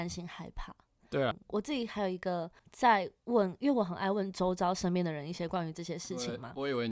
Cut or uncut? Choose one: cut